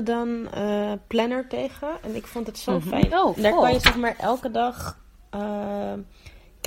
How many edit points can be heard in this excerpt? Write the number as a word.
one